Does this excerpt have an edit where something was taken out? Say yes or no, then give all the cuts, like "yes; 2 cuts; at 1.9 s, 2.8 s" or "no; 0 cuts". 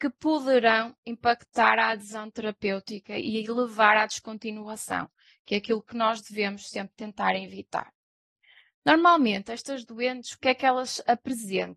no; 0 cuts